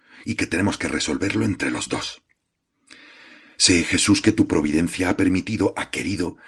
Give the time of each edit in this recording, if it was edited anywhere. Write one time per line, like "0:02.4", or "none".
none